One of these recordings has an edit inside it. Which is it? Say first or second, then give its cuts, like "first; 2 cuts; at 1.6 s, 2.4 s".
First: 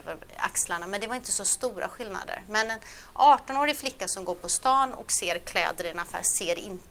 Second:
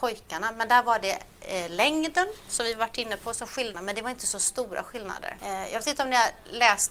second; 2 cuts; at 3.7 s, 5.4 s